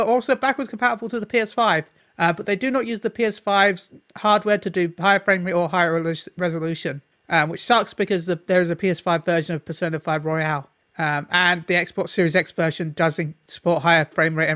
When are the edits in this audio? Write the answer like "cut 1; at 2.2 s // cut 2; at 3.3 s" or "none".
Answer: none